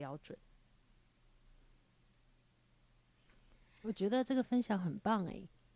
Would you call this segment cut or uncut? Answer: uncut